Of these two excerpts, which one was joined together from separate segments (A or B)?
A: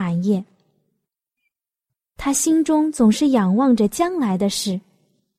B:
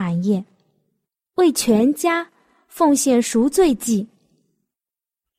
B